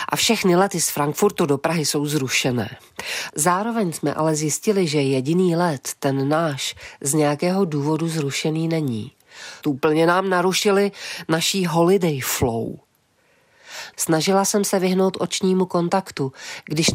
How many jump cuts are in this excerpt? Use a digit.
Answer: 3